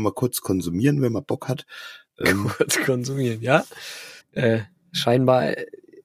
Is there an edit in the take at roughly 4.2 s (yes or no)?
yes